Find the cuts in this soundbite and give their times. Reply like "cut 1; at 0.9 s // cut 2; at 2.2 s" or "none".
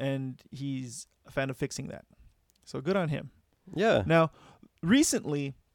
none

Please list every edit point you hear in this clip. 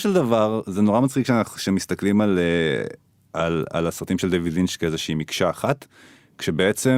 none

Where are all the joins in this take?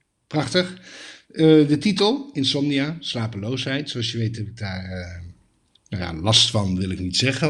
none

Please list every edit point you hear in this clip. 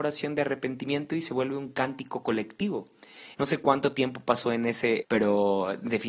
cut 1; at 3.3 s // cut 2; at 5.0 s

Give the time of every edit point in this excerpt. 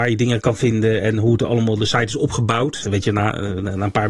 cut 1; at 2.8 s

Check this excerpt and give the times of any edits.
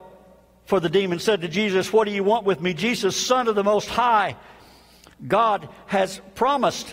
none

